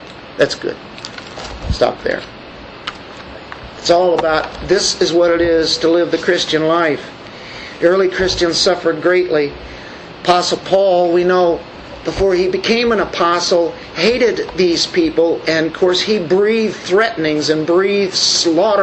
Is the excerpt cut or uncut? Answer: uncut